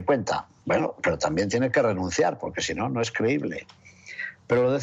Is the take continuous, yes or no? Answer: yes